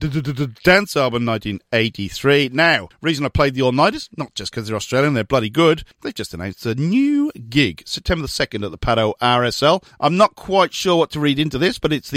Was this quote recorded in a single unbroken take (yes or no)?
yes